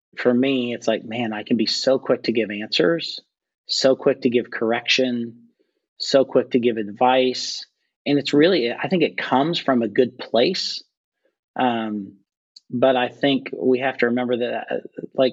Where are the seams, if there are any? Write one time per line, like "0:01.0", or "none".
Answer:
none